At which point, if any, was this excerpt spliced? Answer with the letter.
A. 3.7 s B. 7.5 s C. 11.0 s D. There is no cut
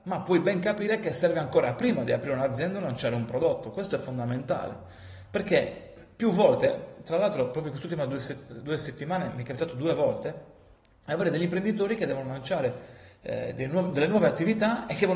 D